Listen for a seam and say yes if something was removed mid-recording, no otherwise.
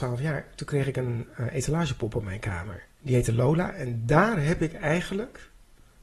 yes